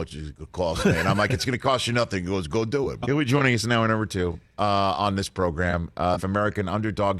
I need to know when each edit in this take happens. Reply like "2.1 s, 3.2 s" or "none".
3.0 s, 6.2 s